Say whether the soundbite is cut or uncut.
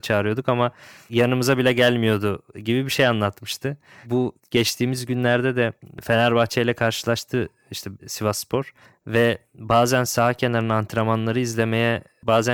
cut